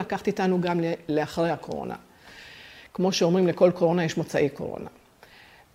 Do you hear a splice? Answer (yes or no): no